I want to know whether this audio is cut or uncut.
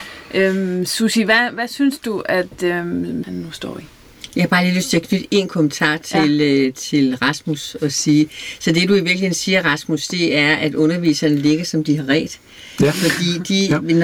cut